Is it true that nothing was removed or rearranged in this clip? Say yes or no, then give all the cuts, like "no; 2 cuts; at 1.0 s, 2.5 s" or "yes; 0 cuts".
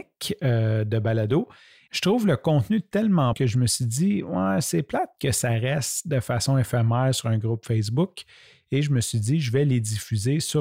no; 1 cut; at 3.3 s